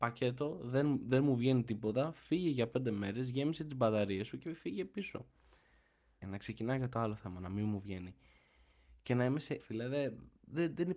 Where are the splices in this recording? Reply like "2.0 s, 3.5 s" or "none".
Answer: 6.2 s, 9.6 s